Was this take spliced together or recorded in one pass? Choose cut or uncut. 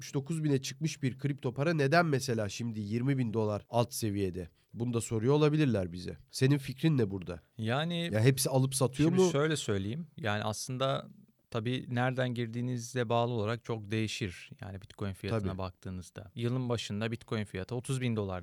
uncut